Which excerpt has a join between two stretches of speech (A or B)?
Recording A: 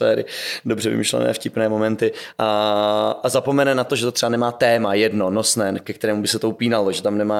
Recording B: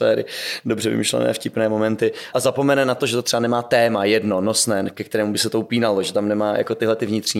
B